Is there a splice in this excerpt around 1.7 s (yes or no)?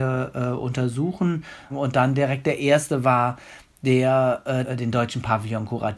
yes